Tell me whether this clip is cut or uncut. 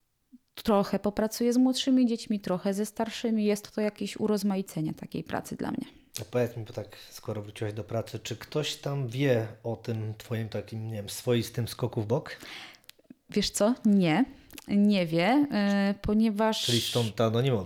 cut